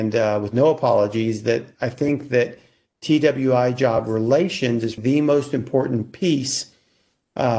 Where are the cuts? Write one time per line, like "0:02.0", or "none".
0:05.0